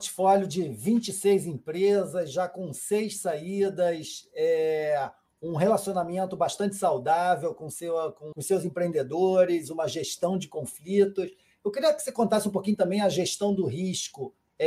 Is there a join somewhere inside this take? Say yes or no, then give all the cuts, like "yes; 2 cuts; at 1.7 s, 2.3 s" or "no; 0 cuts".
no; 0 cuts